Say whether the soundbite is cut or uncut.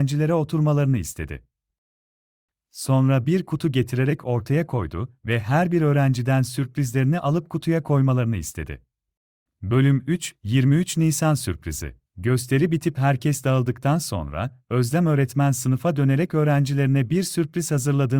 cut